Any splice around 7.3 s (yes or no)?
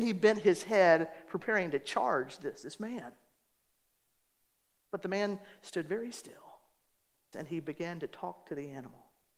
yes